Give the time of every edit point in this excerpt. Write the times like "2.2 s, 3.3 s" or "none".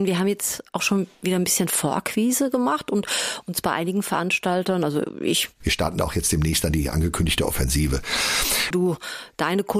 5.6 s, 8.7 s

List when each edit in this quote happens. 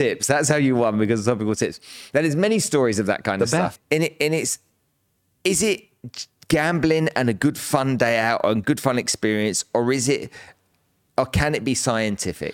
3.8 s

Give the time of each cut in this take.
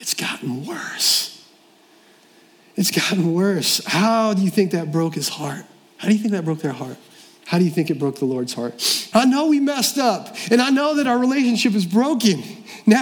9.1 s

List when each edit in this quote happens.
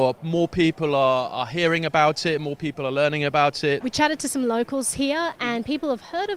3.8 s

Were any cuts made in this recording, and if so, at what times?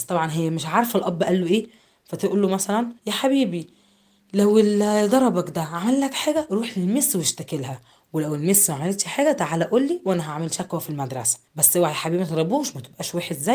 3.0 s, 11.5 s

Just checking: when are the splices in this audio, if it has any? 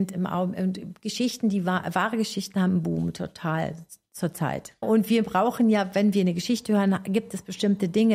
4.8 s

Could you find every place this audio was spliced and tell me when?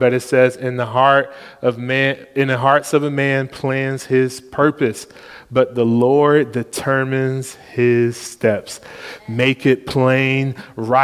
9.2 s

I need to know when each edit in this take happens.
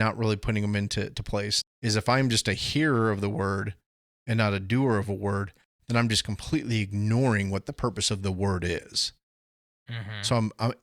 1.6 s, 9.7 s

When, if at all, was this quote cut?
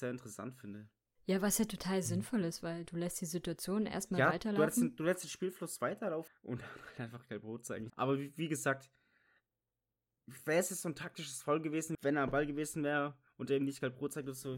6.3 s, 7.9 s, 11.9 s

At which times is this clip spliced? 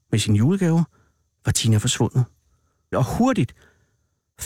2.9 s

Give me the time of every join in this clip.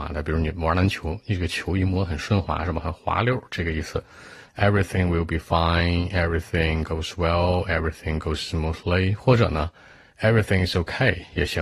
4.5 s

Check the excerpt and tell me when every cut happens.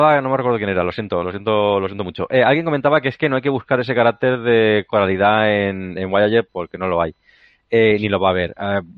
6.5 s

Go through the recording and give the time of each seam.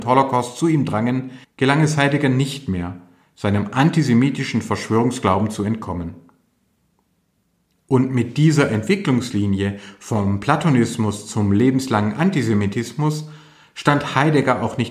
1.4 s, 7.7 s

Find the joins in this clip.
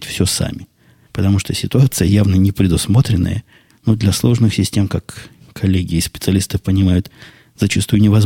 1.1 s, 3.7 s

